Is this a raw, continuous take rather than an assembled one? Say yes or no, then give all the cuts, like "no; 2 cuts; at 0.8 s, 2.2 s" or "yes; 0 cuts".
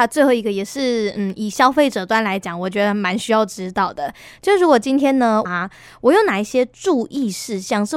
no; 1 cut; at 5.5 s